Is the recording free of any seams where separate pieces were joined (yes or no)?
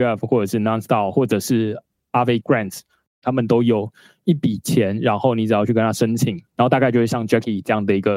no